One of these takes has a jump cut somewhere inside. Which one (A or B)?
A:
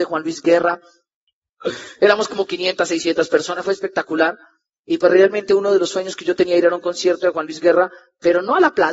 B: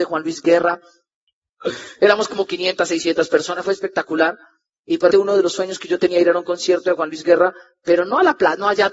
B